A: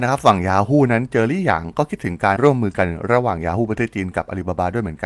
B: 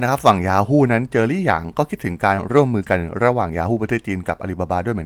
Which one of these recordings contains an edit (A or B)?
A